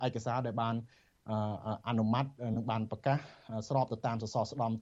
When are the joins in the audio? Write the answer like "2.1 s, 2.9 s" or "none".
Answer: none